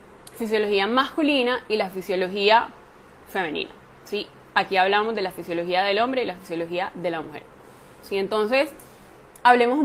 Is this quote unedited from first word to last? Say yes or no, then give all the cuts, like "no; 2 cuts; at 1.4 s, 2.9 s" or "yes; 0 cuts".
no; 1 cut; at 8.0 s